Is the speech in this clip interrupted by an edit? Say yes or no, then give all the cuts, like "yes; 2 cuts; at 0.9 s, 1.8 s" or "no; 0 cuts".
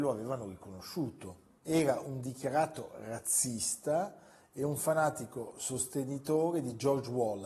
yes; 1 cut; at 1.6 s